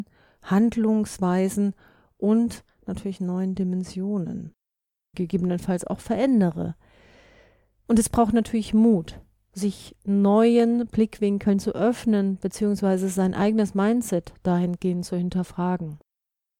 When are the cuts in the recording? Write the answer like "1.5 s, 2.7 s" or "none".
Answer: 5.1 s